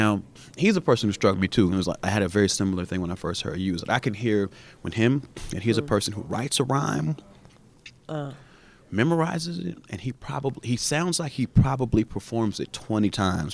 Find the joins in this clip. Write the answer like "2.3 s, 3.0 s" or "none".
none